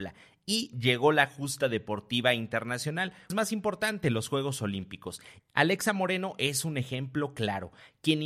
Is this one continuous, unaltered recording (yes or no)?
no